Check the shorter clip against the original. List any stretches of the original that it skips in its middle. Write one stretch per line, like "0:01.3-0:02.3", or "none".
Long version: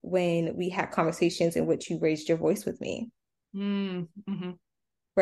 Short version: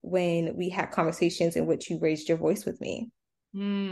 none